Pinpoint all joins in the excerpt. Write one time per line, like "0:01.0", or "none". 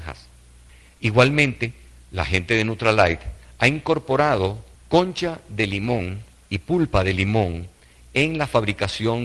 0:04.7